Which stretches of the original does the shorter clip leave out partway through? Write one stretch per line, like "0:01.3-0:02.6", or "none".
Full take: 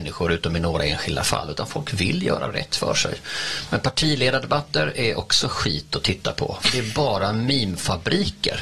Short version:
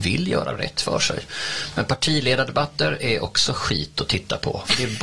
none

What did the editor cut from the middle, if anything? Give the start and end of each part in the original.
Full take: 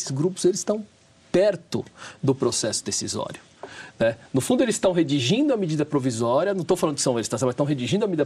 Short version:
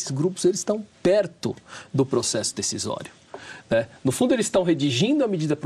0:00.9-0:01.2

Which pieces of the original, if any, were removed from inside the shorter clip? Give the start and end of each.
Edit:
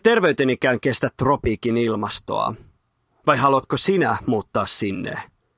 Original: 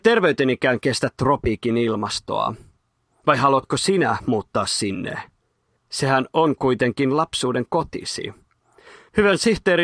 none

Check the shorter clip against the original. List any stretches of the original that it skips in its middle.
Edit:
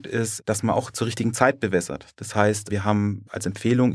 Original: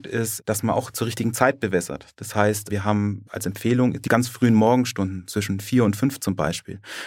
none

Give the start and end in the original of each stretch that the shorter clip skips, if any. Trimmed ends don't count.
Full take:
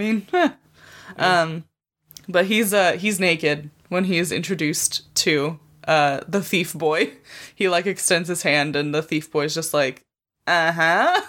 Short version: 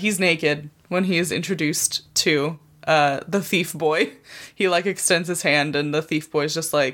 none

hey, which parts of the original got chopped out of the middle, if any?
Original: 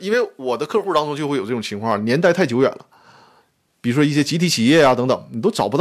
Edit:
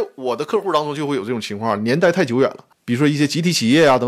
0:02.9-0:03.7

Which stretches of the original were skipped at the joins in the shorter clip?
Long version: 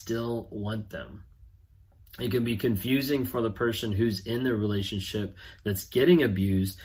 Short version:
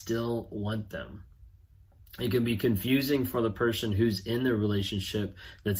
none

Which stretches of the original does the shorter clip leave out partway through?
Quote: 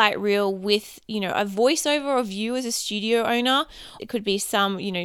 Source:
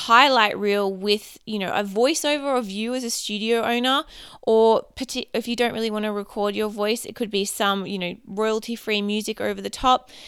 0:04.4-0:07.1

